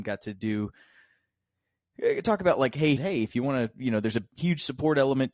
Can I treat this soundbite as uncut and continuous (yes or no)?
no